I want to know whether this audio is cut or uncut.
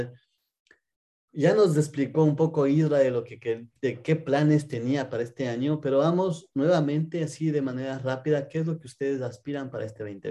uncut